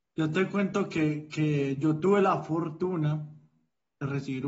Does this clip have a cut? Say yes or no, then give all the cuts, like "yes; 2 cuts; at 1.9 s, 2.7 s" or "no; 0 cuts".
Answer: no; 0 cuts